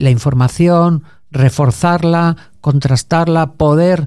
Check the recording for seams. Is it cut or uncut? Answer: uncut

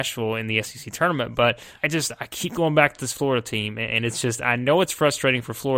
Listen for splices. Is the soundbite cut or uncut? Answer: cut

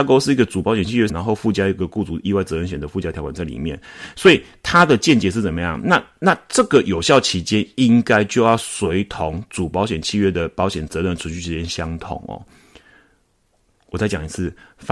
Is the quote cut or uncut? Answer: cut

